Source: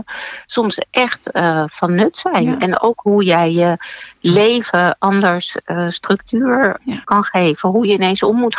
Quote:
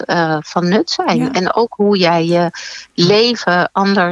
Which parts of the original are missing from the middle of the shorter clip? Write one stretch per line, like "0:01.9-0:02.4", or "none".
none

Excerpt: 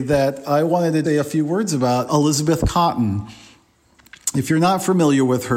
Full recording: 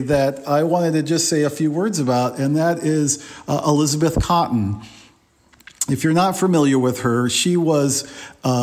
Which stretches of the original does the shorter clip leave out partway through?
0:01.0-0:01.3
0:02.3-0:03.6

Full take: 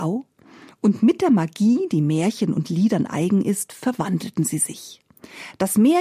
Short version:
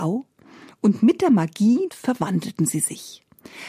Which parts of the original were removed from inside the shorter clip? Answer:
0:01.9-0:03.7

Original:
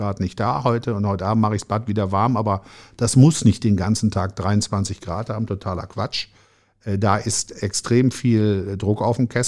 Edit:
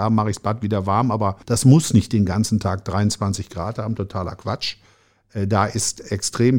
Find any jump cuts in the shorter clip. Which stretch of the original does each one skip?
0:02.7-0:02.9

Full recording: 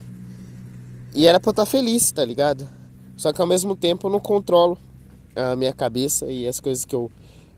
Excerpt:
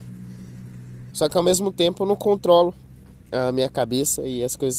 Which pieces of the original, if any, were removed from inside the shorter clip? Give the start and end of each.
0:01.1-0:03.2

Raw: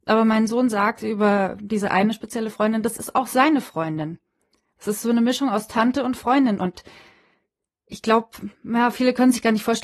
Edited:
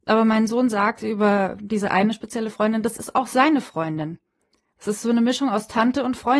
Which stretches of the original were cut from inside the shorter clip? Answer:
none

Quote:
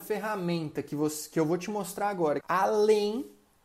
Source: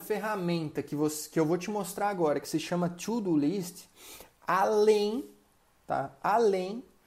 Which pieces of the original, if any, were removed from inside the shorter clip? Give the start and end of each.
0:02.4-0:04.4

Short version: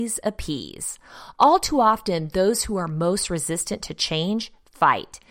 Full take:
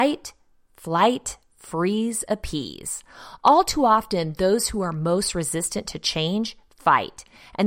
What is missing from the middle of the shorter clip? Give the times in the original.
none

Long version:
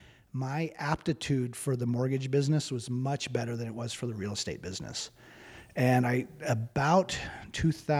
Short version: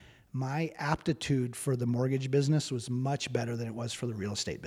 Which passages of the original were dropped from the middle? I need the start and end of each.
none

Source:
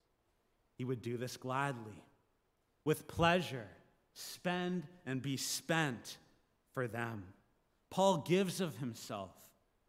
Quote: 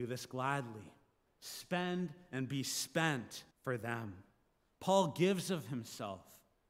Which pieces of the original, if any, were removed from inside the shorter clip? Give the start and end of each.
0:02.4-0:04.0
0:06.2-0:06.6

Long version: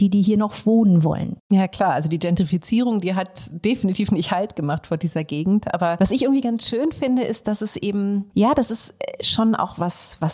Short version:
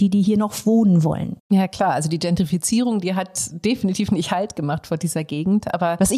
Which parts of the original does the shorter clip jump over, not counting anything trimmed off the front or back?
none

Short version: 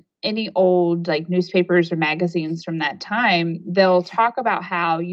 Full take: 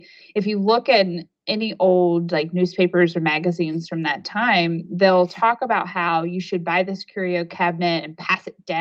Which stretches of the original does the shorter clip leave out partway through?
none

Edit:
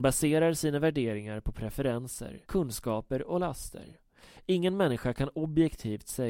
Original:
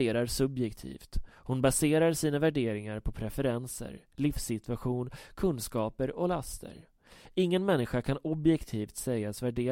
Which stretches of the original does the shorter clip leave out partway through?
0:04.1-0:05.3

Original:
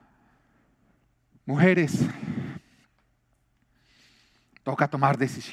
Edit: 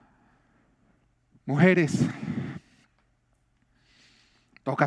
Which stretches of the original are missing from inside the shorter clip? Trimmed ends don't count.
none

